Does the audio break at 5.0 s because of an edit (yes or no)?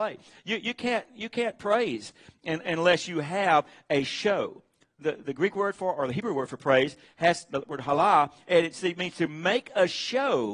yes